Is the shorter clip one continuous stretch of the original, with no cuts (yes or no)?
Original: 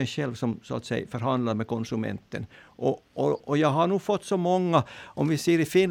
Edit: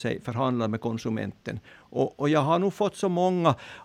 no